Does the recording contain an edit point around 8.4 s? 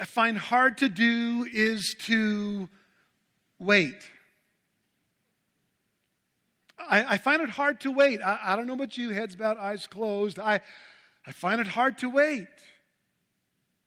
no; 0 cuts

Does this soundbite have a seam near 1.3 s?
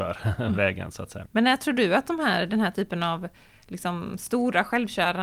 yes; 1 cut; at 1.3 s

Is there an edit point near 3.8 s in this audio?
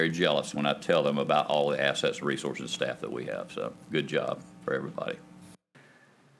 yes; 1 cut; at 3.8 s

